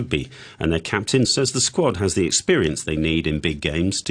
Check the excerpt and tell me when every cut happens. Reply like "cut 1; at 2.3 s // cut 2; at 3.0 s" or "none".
cut 1; at 1.3 s